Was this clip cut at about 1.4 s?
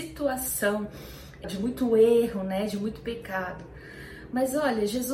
yes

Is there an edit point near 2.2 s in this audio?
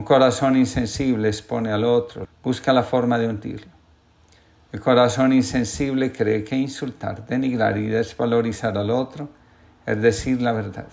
yes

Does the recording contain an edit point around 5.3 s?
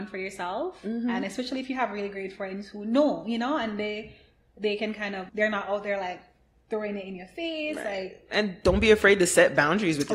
yes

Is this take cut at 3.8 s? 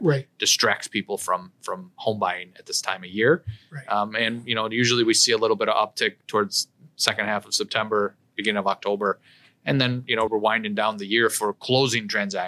no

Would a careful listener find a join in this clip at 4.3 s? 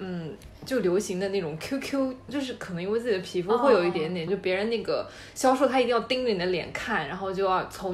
yes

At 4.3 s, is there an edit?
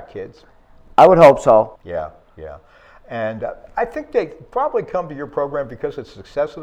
no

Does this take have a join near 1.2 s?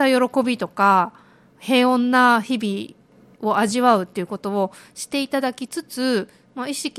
no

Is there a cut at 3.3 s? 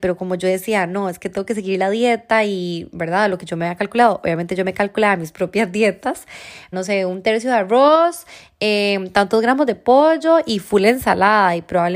no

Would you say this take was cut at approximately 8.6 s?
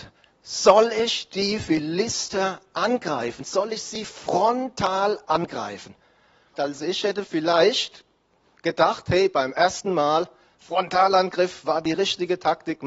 no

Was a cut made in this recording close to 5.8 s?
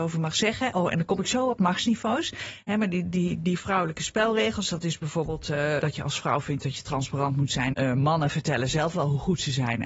yes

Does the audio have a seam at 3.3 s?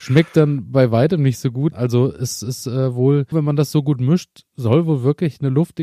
yes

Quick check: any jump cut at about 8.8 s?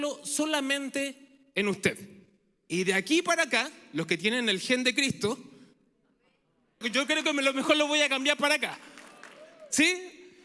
no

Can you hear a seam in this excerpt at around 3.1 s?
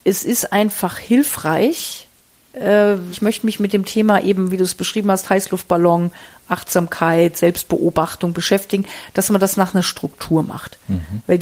yes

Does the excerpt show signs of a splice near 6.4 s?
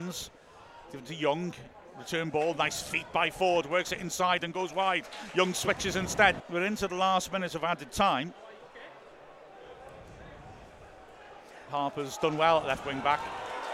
yes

